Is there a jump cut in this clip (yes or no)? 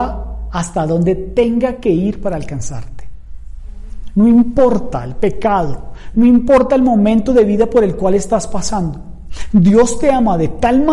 yes